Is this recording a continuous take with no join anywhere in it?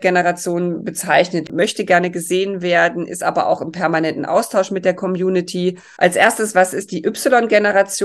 no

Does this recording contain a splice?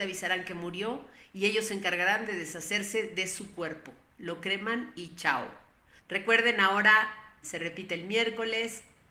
yes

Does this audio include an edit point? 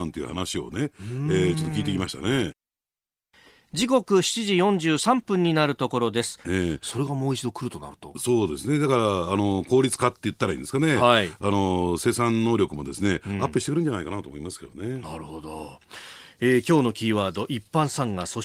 yes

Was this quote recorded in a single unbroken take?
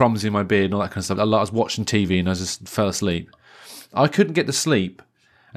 no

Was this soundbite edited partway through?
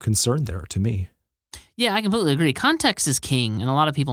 no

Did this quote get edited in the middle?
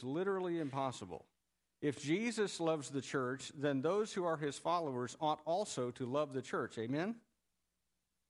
no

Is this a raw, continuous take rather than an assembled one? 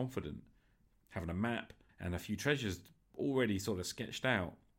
no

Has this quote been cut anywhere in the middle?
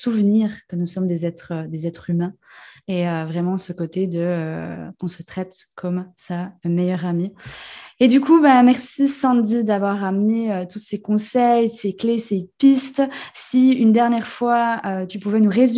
no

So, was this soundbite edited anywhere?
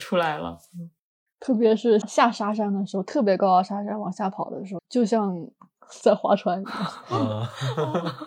yes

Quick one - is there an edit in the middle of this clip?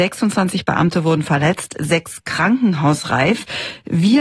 no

